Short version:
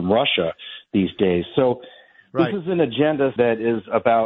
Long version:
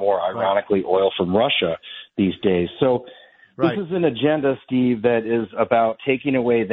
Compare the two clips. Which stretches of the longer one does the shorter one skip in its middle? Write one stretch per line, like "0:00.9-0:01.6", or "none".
0:04.6-0:05.0